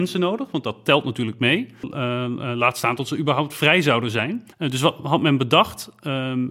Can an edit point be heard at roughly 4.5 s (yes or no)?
yes